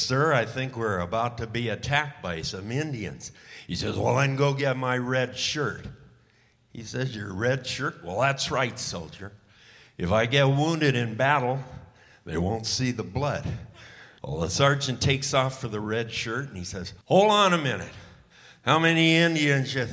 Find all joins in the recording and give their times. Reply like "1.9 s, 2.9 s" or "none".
14.2 s, 17.0 s